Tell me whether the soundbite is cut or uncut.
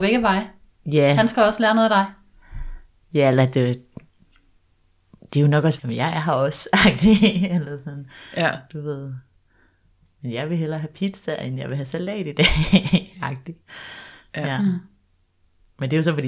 cut